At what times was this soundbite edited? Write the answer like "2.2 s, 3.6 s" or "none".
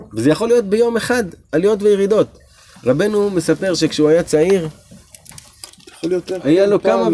none